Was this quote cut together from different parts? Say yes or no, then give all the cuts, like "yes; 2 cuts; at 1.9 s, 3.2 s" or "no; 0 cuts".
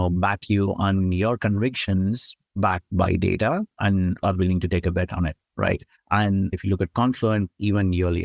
yes; 2 cuts; at 2.4 s, 5.9 s